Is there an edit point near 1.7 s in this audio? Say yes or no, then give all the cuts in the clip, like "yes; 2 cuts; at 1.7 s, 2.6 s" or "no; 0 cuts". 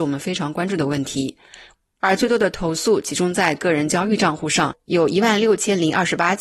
yes; 1 cut; at 1.7 s